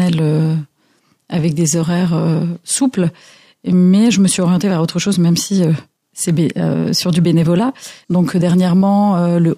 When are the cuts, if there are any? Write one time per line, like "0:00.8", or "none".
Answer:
0:08.0